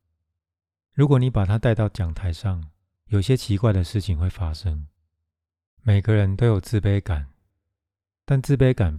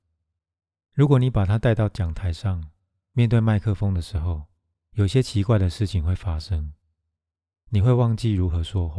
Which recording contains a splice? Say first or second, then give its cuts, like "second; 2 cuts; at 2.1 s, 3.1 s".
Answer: first; 2 cuts; at 2.9 s, 5.7 s